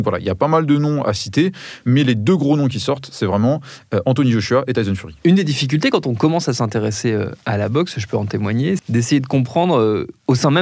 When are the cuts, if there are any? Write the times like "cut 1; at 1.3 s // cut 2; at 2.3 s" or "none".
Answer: cut 1; at 8.8 s